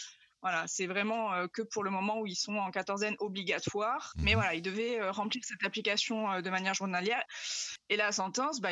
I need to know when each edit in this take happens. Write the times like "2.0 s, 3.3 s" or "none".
4.1 s, 7.3 s